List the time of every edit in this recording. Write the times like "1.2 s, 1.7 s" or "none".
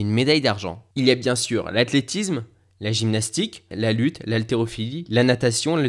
0.9 s, 3.7 s